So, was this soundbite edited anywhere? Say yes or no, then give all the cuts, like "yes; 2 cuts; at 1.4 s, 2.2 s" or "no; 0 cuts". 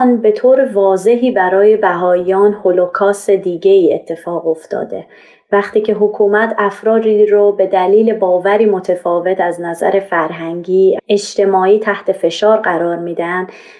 yes; 1 cut; at 11.0 s